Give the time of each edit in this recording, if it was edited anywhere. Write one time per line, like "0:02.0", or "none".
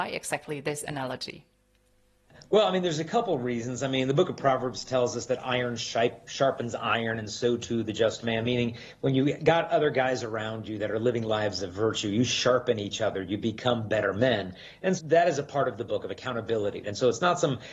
0:15.0
0:16.8